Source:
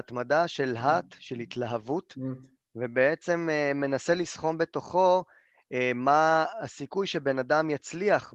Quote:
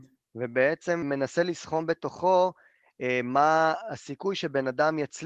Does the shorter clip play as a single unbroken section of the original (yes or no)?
no